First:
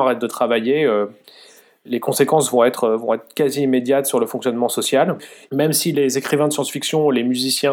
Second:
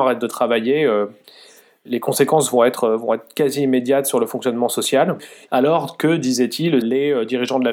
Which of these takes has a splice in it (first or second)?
second